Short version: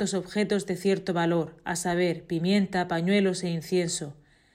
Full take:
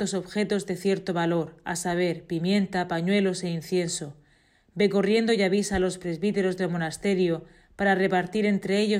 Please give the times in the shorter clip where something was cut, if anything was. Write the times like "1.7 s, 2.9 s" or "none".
none